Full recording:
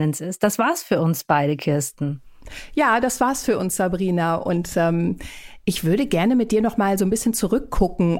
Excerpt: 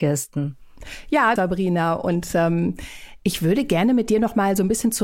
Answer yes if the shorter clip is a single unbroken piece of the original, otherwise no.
no